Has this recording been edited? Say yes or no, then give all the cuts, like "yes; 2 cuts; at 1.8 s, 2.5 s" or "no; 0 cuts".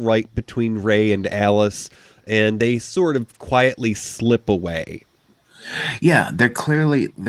no; 0 cuts